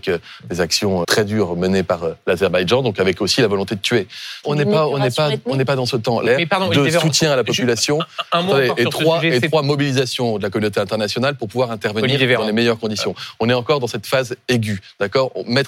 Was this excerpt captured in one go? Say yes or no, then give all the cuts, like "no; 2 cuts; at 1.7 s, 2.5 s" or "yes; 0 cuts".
no; 3 cuts; at 1.0 s, 4.4 s, 6.3 s